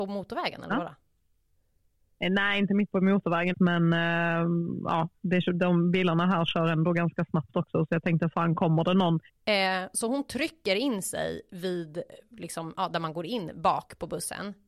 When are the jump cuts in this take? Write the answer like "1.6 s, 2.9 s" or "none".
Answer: 3.5 s, 9.3 s